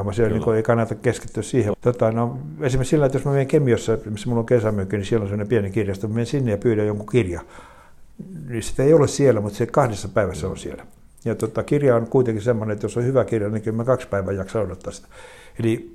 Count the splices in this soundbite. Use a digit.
1